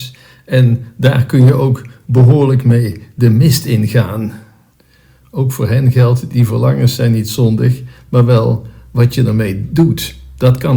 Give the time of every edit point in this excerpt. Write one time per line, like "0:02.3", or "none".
none